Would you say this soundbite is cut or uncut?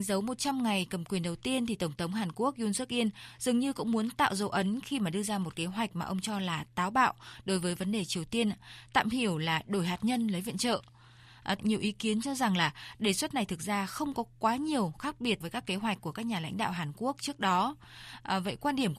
cut